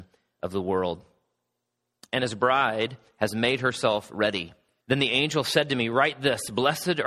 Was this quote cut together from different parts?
yes; 1 cut; at 4.8 s

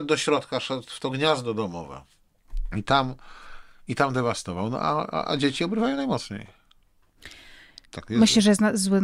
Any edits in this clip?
yes; 1 cut; at 7.8 s

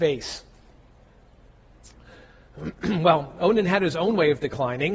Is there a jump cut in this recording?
no; 0 cuts

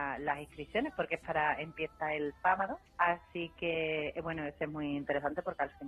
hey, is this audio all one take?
no; 1 cut; at 2.9 s

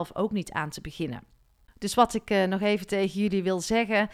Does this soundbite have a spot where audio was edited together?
no; 0 cuts

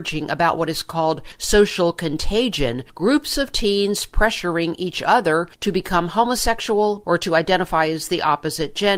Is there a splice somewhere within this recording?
yes; 1 cut; at 7.0 s

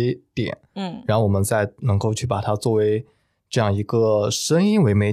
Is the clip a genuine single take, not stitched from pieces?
yes; 0 cuts

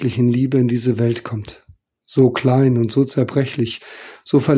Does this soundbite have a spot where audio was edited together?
no; 0 cuts

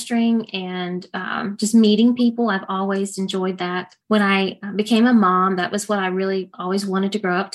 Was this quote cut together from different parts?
yes; 1 cut; at 4.0 s

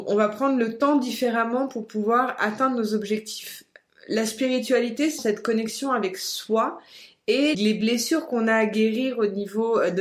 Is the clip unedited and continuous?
no; 2 cuts; at 5.2 s, 7.5 s

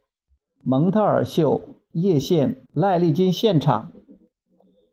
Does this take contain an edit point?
yes; 1 cut; at 2.7 s

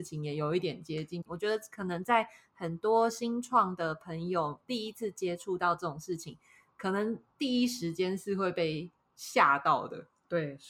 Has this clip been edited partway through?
yes; 1 cut; at 1.3 s

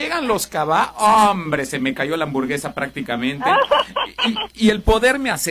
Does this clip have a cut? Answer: no; 0 cuts

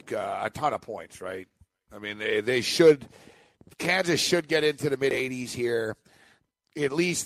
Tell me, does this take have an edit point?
no; 0 cuts

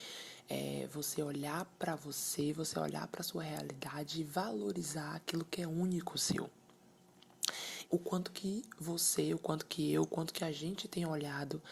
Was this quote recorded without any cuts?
no; 1 cut; at 7.9 s

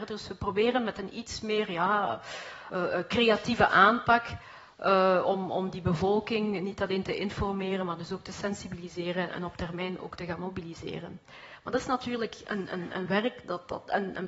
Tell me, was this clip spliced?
no; 0 cuts

